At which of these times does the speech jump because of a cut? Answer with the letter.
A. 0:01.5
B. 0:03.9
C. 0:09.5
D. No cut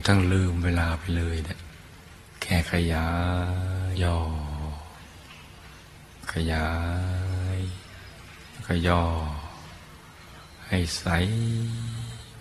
B